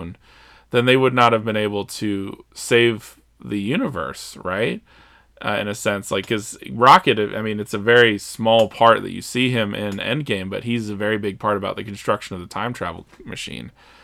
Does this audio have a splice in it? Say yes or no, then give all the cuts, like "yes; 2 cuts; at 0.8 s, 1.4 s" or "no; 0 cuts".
no; 0 cuts